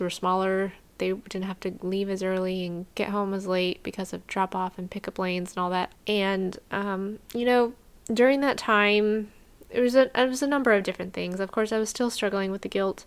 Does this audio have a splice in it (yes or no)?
yes